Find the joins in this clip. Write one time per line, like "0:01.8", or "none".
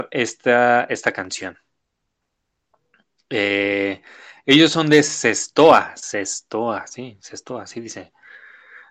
none